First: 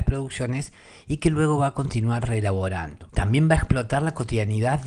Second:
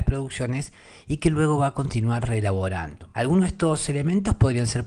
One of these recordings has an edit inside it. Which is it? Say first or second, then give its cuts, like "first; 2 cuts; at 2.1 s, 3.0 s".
first; 1 cut; at 3.1 s